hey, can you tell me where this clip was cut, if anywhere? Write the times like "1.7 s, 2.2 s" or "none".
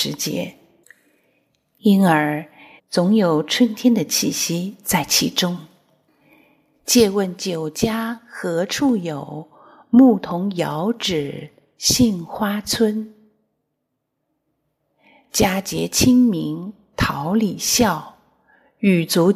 2.8 s